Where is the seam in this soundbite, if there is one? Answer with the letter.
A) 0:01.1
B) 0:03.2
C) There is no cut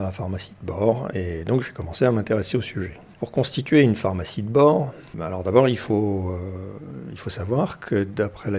C